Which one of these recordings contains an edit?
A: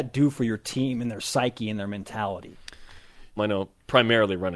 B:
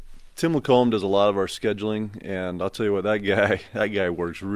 A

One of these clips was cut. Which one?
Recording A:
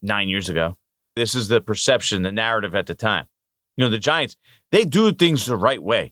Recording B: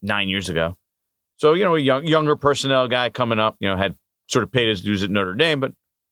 A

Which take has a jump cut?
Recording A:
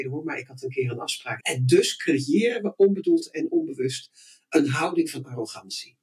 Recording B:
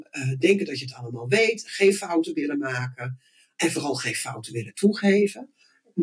A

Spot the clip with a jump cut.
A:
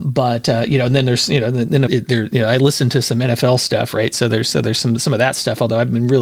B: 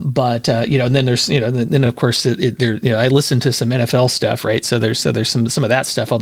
A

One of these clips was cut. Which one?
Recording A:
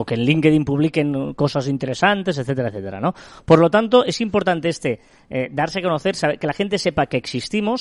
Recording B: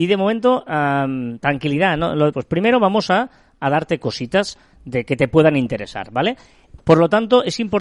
B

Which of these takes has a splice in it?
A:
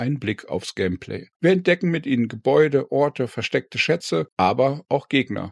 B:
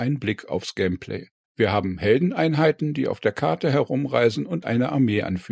A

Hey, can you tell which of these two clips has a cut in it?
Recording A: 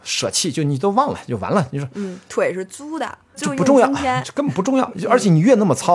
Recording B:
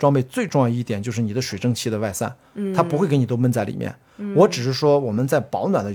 A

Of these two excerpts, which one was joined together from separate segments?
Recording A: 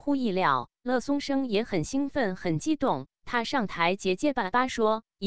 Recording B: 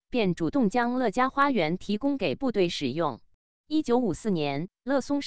B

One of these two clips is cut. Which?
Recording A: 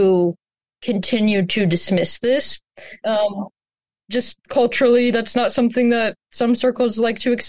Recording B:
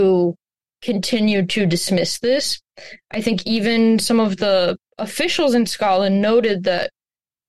A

